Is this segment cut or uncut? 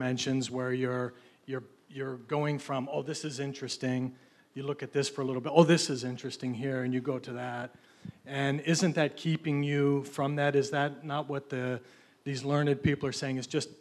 uncut